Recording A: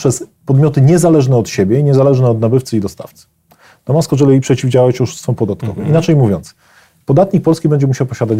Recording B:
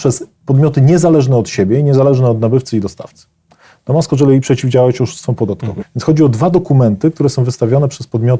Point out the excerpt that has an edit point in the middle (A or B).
B